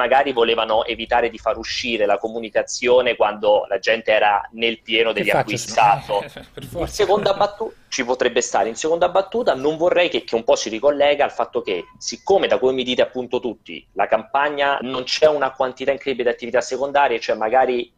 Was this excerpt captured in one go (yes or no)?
no